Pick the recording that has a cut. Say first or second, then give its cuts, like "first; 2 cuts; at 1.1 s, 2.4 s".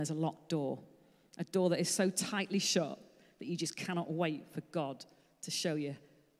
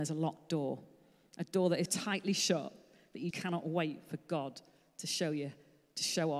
second; 2 cuts; at 1.9 s, 3.3 s